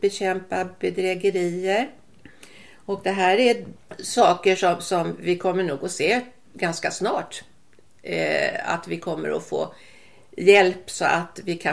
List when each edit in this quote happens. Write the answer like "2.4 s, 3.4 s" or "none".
none